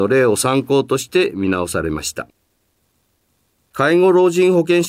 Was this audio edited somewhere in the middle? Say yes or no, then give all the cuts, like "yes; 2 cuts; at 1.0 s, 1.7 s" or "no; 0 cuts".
no; 0 cuts